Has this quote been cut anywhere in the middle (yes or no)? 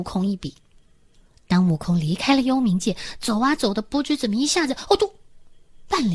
no